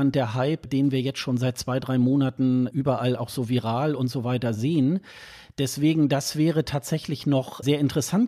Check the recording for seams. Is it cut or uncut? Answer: uncut